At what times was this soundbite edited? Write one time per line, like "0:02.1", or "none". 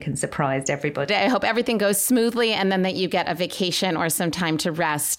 0:01.1